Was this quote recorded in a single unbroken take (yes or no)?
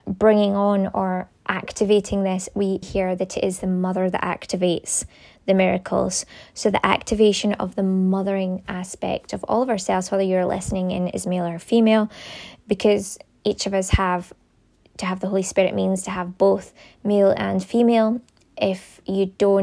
no